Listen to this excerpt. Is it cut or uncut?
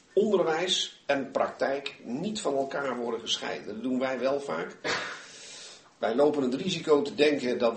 uncut